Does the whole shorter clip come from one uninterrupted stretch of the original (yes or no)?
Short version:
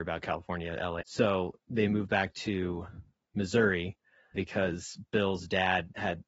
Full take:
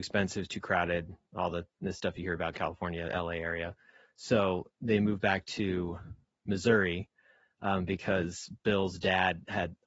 no